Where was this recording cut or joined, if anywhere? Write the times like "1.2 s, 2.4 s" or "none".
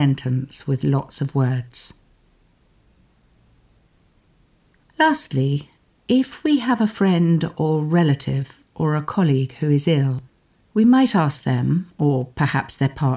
none